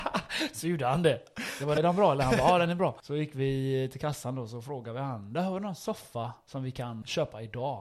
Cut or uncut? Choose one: cut